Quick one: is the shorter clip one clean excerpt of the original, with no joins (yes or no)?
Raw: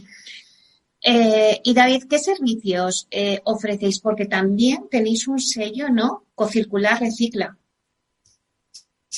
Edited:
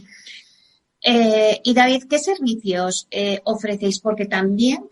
yes